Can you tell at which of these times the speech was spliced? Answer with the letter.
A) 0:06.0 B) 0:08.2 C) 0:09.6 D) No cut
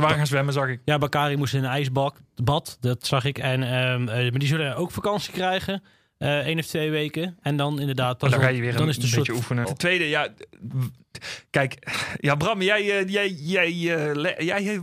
C